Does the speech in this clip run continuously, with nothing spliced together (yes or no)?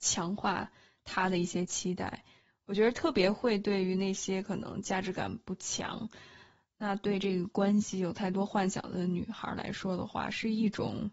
yes